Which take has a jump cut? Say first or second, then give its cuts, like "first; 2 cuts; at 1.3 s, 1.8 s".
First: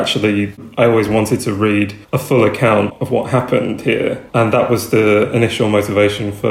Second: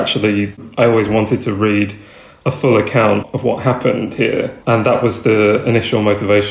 first; 1 cut; at 2.0 s